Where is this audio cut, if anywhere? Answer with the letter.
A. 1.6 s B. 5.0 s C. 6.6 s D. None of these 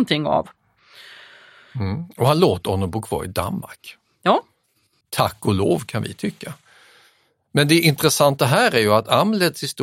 B